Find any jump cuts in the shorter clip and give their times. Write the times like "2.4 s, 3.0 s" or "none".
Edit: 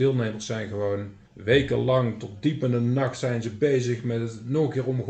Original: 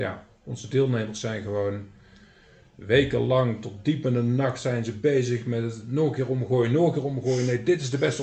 1.2 s

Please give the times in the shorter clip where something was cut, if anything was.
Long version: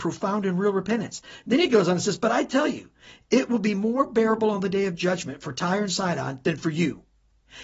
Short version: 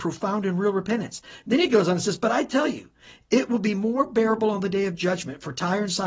none

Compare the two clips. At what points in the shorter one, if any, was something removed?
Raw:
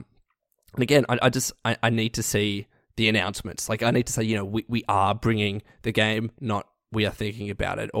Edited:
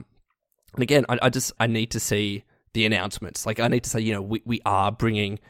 1.6 s

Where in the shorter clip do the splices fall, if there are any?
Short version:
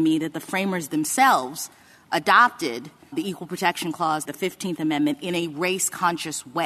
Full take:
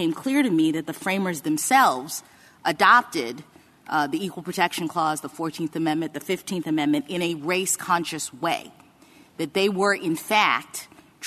3.1 s, 4.2 s

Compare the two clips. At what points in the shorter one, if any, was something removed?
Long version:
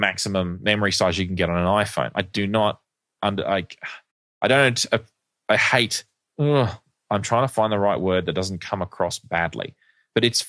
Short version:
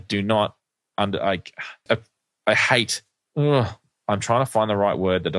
1.9 s

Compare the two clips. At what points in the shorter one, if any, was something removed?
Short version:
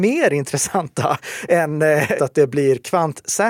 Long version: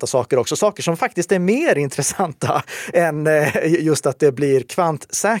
2.2 s

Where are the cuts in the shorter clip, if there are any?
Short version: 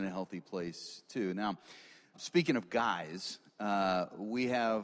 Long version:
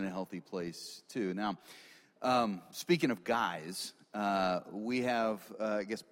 2.1 s

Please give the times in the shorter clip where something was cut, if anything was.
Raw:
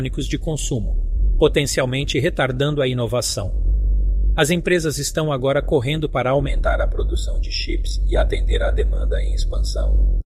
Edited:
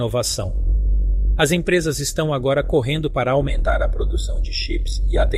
none

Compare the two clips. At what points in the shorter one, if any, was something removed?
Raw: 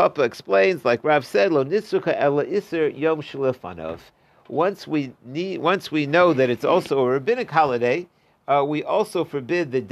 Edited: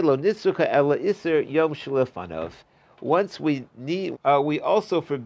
4.1 s

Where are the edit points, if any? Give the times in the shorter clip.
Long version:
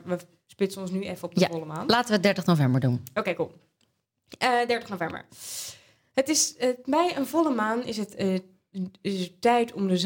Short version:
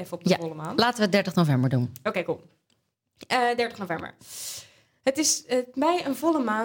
none

